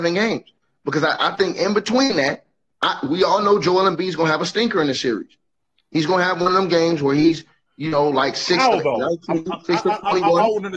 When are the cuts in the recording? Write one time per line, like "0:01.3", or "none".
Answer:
none